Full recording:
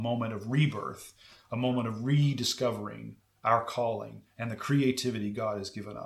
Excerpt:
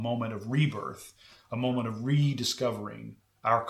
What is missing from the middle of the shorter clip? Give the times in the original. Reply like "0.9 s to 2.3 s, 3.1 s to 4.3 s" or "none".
none